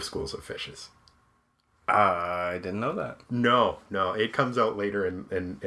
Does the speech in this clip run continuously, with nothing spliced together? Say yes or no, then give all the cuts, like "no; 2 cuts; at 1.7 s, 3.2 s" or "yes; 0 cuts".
yes; 0 cuts